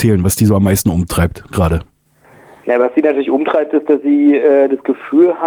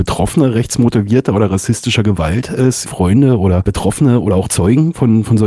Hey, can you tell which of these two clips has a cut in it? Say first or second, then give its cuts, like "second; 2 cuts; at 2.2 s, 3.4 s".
second; 1 cut; at 2.9 s